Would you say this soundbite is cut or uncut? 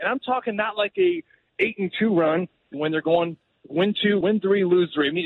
cut